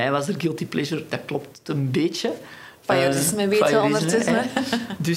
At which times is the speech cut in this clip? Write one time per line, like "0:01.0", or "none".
none